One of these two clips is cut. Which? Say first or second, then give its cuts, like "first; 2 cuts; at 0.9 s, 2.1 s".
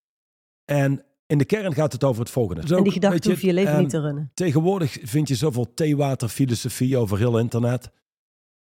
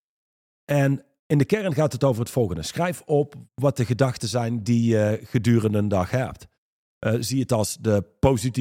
first; 1 cut; at 2.6 s